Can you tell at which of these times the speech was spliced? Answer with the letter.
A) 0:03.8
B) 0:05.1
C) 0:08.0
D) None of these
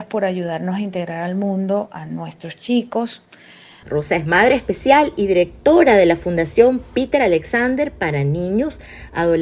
A